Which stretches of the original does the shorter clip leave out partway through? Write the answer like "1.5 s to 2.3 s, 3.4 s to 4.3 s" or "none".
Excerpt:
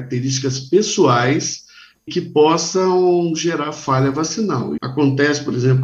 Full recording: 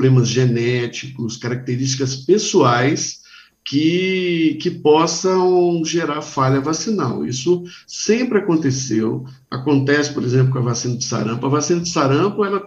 3.6 s to 4.6 s, 7.3 s to 9.5 s